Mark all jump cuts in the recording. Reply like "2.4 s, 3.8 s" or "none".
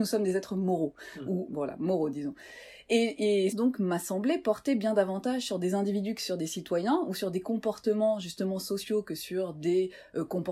1.5 s, 3.5 s